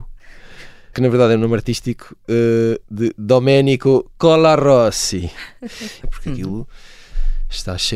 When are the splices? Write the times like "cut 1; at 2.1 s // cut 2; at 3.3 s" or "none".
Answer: cut 1; at 0.9 s // cut 2; at 6.0 s

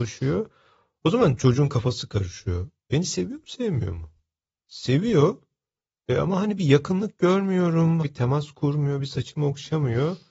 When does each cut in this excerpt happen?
cut 1; at 8.0 s

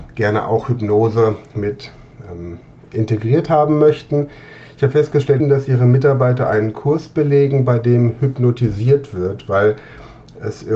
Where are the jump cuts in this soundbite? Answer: cut 1; at 5.4 s

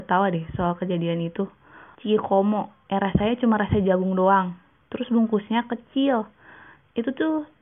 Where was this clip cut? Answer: cut 1; at 1.9 s

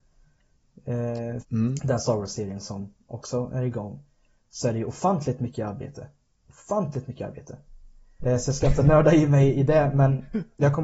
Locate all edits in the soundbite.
cut 1; at 1.4 s // cut 2; at 8.2 s

